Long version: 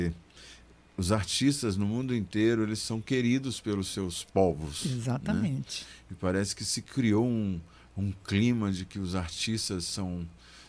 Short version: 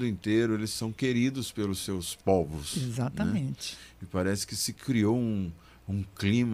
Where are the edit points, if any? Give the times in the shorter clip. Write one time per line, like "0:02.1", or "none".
none